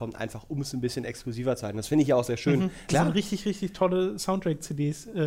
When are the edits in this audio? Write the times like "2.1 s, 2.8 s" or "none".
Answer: 2.9 s